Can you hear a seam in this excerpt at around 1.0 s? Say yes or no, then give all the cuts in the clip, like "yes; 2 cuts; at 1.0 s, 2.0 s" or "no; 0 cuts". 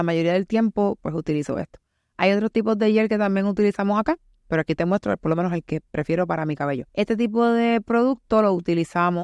yes; 2 cuts; at 1.0 s, 6.9 s